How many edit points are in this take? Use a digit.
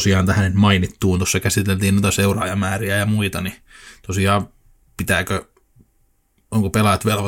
0